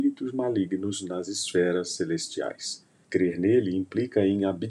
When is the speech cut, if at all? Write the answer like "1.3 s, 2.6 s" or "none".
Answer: 3.0 s